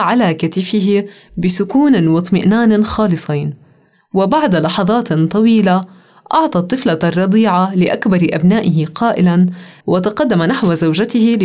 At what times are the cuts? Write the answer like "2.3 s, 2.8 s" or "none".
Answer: 9.8 s